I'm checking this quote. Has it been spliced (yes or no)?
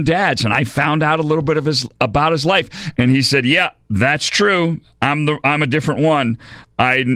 yes